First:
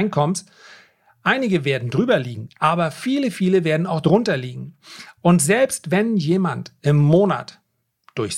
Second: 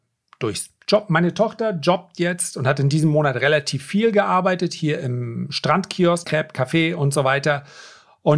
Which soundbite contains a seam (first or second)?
second